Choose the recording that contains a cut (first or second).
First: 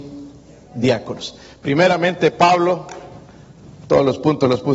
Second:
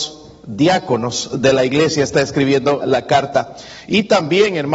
second